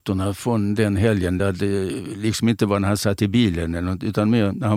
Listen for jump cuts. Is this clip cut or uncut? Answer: uncut